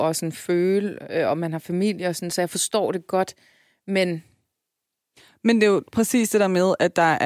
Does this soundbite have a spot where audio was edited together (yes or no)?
no